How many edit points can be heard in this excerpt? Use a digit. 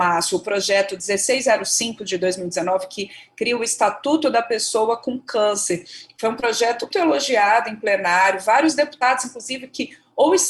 1